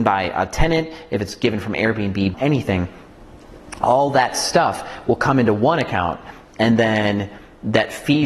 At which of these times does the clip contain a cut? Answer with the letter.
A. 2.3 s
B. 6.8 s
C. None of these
A